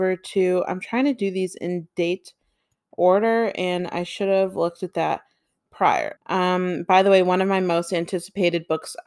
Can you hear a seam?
yes; 1 cut; at 6.2 s

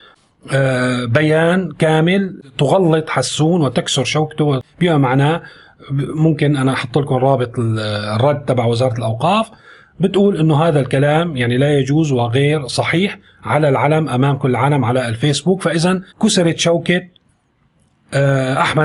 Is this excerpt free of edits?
no; 1 cut; at 16.1 s

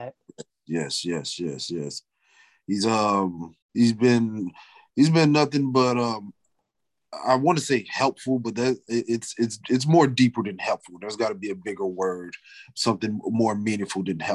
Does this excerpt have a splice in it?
yes; 1 cut; at 3.6 s

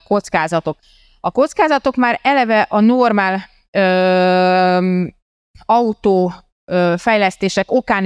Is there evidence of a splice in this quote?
no; 0 cuts

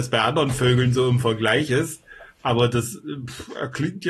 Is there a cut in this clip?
no; 0 cuts

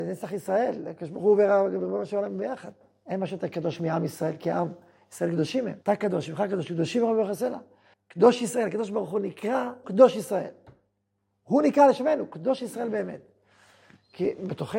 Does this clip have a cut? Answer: yes; 3 cuts; at 5.8 s, 7.9 s, 9.8 s

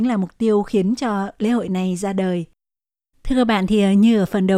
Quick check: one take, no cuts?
yes; 0 cuts

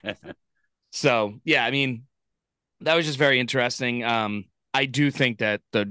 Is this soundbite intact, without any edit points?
yes; 0 cuts

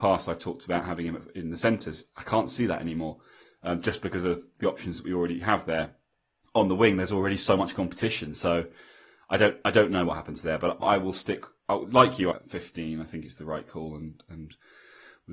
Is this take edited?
yes; 2 cuts; at 10.8 s, 12.3 s

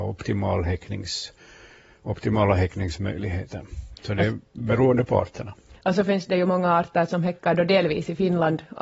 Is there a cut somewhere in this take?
no; 0 cuts

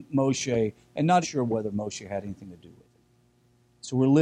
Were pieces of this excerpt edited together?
yes; 1 cut; at 1.2 s

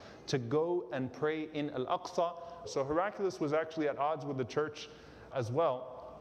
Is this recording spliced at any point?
yes; 2 cuts; at 2.6 s, 5.3 s

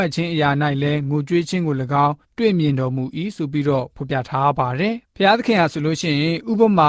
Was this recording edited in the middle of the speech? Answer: yes; 2 cuts; at 2.2 s, 5.0 s

